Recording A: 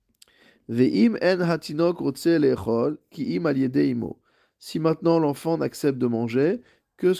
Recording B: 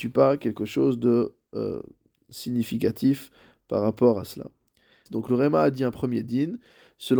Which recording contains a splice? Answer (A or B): B